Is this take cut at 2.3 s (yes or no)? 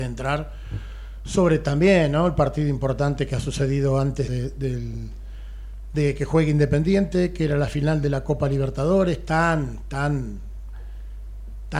no